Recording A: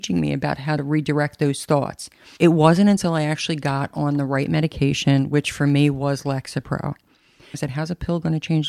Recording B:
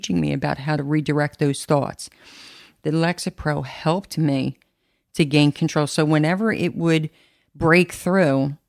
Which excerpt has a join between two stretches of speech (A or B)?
A